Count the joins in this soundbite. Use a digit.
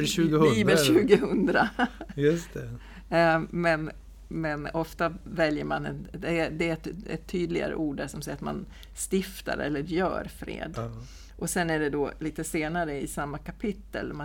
0